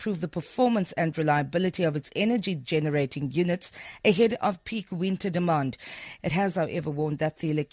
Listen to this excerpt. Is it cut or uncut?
cut